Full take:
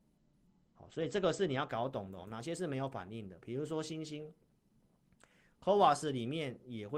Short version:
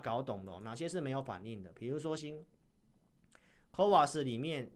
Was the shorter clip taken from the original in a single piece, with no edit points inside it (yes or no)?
no